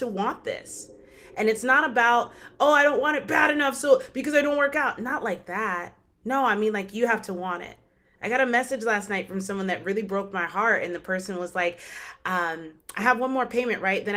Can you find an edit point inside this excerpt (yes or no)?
no